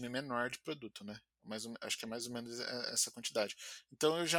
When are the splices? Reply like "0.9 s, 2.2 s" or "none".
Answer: 1.3 s